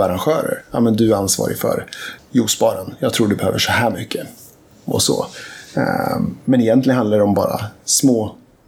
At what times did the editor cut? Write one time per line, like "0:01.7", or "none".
0:02.2